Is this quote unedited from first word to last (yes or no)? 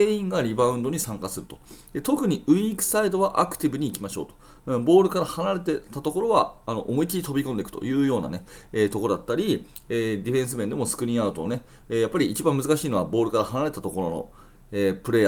yes